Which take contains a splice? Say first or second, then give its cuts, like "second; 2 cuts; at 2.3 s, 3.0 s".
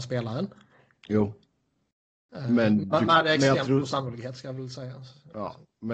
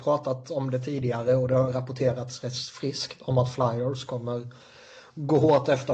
first; 1 cut; at 3.1 s